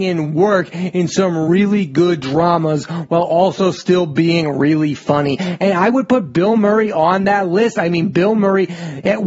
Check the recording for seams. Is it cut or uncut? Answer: uncut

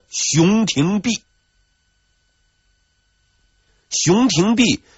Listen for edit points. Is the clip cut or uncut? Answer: uncut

